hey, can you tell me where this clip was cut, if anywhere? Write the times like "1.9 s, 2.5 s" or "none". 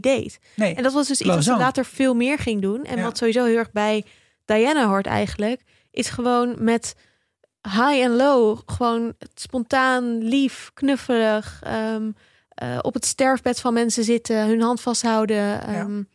none